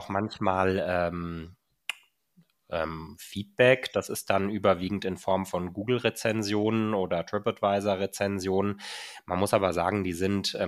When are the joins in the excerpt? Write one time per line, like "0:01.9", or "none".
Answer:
none